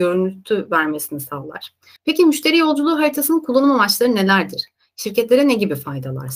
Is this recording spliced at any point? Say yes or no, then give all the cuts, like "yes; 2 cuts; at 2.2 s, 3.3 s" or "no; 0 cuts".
yes; 1 cut; at 2.0 s